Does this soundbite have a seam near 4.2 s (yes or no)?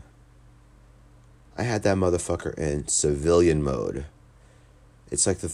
no